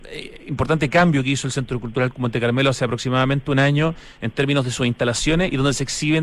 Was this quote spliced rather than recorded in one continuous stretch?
no; 0 cuts

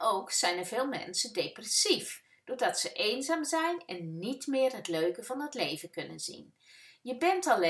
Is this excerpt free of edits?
yes; 0 cuts

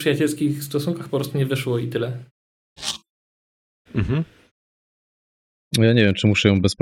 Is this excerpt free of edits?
yes; 0 cuts

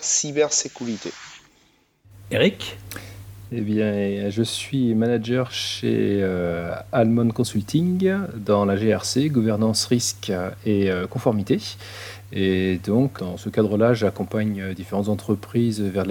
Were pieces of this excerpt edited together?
yes; 1 cut; at 13.2 s

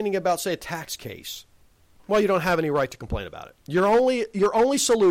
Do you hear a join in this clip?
yes; 2 cuts; at 2.0 s, 3.6 s

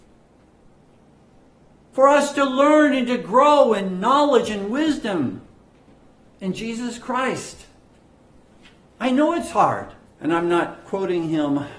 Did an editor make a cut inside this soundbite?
yes; 1 cut; at 10.0 s

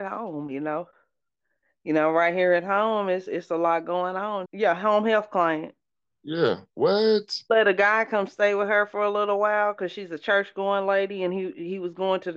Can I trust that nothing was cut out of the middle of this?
no; 1 cut; at 4.4 s

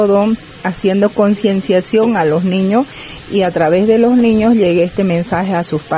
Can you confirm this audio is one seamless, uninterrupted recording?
yes; 0 cuts

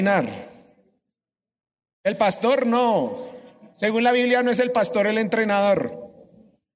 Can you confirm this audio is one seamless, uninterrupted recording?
yes; 0 cuts

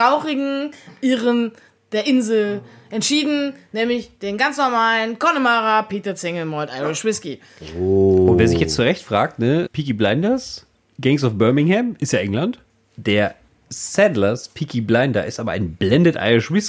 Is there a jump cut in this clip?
no; 0 cuts

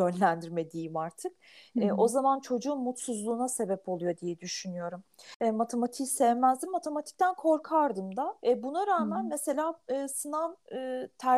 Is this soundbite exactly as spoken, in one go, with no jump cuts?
no; 1 cut; at 8.4 s

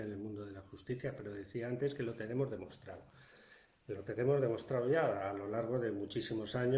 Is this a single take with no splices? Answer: yes; 0 cuts

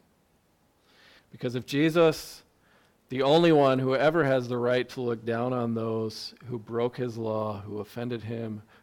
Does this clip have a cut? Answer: yes; 1 cut; at 1.2 s

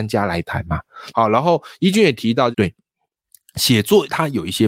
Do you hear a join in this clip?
yes; 2 cuts; at 1.1 s, 2.5 s

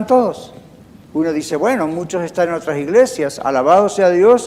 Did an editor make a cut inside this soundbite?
no; 0 cuts

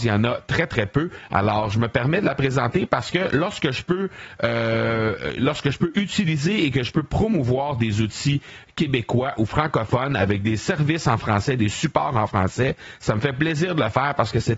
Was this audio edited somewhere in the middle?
no; 0 cuts

